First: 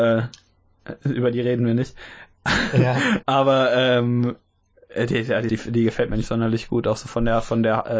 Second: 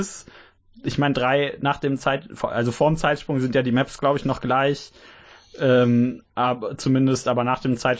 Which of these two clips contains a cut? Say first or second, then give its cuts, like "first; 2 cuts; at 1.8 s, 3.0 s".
first; 2 cuts; at 3.2 s, 5.5 s